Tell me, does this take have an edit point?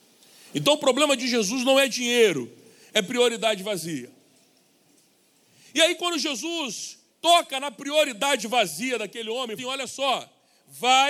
yes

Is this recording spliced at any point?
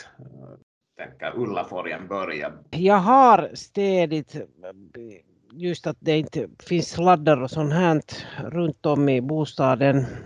yes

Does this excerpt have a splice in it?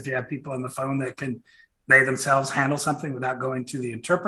no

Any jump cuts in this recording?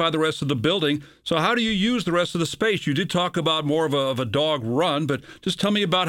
no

